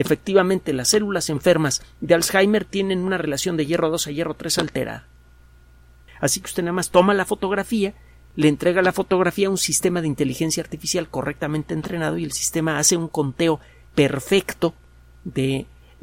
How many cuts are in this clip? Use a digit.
1